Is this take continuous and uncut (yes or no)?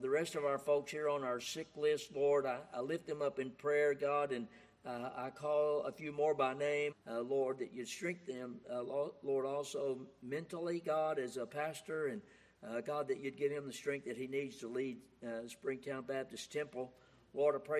no